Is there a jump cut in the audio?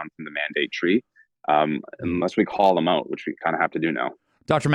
no; 0 cuts

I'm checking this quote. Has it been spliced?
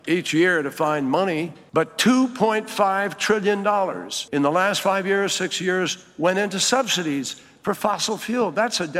no; 0 cuts

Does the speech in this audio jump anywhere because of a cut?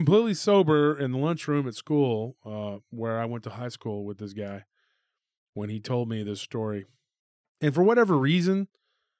no; 0 cuts

